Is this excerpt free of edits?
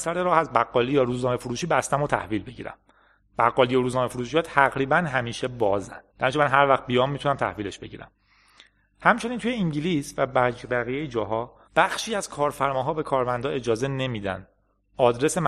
no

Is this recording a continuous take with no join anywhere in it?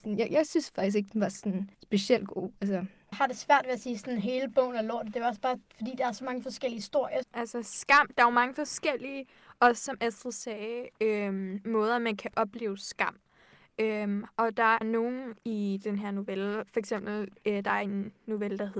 no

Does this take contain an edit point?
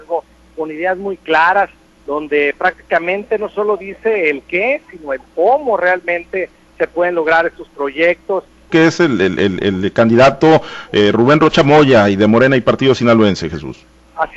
yes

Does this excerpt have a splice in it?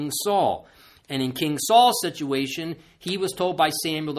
no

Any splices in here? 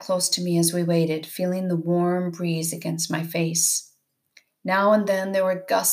no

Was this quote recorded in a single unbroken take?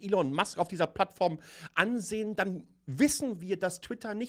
yes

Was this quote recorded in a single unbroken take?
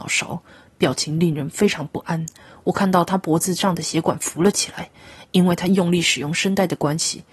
no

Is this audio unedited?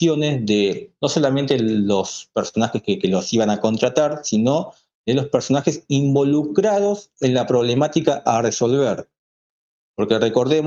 yes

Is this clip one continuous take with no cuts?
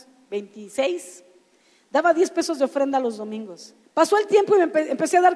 no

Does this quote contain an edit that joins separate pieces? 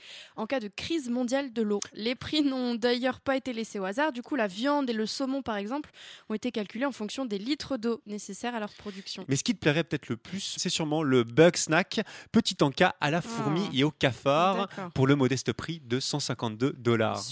yes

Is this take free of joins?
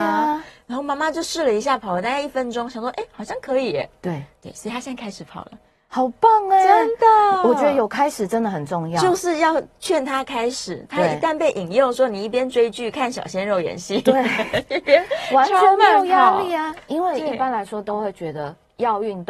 yes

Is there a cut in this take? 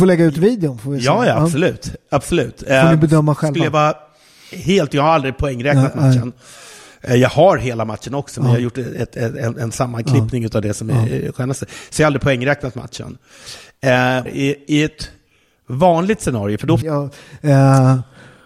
yes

